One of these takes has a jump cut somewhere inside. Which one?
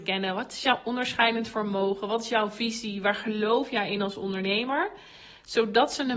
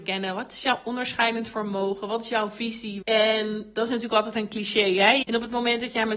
second; 2 cuts; at 3.0 s, 5.2 s

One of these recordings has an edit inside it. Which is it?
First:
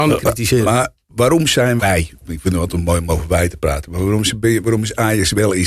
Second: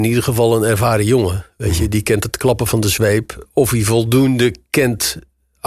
first; 1 cut; at 1.8 s

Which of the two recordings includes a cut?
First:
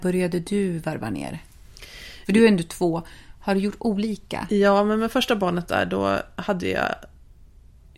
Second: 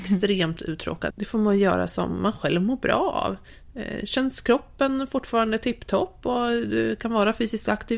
second; 1 cut; at 1.1 s

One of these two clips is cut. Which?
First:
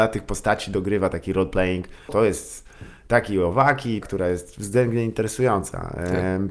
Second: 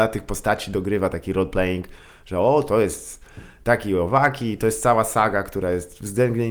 first; 2 cuts; at 2.1 s, 4.0 s

